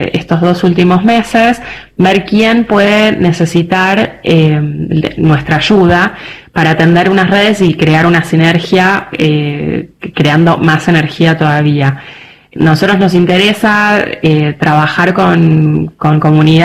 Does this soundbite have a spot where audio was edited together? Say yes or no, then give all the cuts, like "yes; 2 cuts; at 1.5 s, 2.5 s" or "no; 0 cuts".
no; 0 cuts